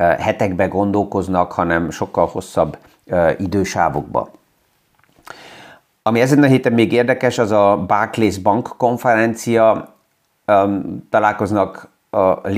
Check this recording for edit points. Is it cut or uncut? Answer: uncut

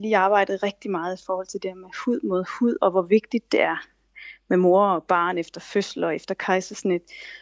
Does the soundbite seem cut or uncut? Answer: uncut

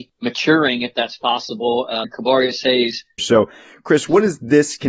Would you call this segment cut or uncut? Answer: cut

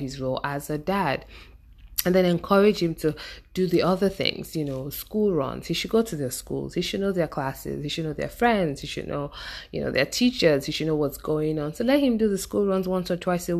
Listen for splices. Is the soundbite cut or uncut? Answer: uncut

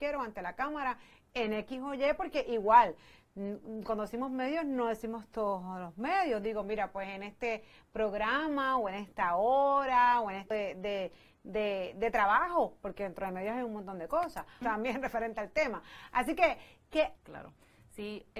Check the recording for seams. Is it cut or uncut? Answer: cut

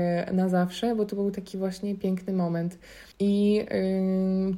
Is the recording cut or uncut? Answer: cut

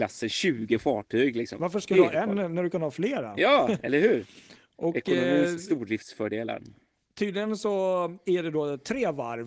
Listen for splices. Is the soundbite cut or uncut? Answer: uncut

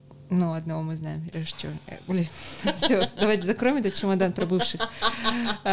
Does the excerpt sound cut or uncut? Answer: uncut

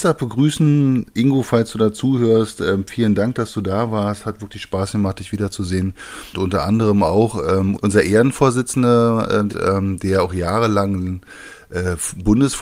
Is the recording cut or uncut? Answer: cut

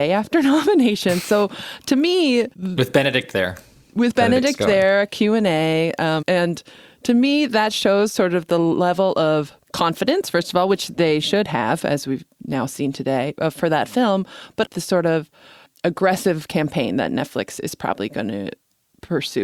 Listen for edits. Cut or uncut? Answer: cut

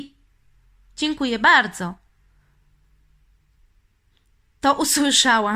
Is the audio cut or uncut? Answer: uncut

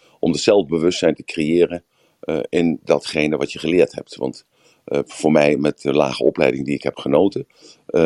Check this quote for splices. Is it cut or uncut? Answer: uncut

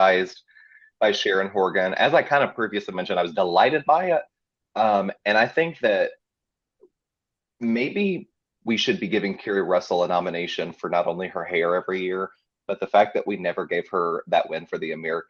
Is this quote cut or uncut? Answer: uncut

